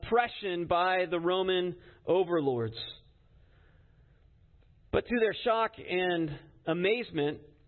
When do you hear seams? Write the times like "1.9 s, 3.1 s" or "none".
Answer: none